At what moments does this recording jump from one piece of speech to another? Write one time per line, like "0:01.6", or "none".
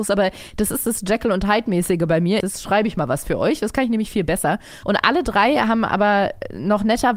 0:02.4
0:04.8